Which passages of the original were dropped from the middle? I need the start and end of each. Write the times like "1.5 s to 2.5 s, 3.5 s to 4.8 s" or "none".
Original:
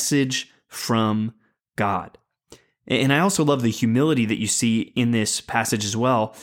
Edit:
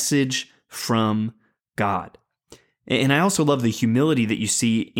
none